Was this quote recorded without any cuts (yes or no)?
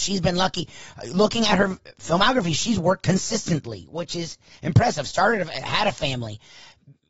yes